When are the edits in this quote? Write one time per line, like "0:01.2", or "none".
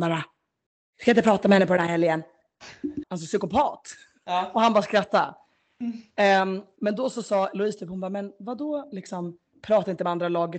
0:03.0